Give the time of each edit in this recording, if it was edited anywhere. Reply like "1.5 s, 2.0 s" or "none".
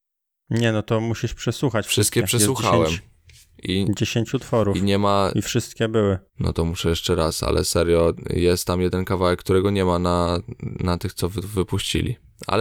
6.3 s